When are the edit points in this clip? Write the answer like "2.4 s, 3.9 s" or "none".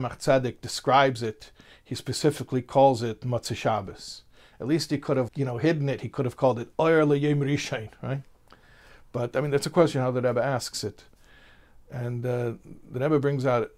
5.3 s